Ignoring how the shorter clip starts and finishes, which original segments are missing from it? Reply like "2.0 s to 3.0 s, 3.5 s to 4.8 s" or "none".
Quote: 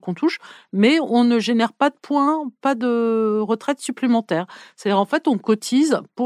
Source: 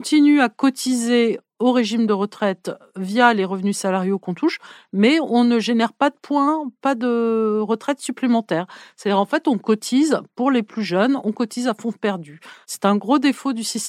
none